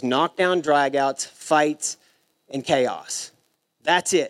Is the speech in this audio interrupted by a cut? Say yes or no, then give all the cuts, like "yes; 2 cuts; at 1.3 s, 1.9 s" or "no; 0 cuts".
no; 0 cuts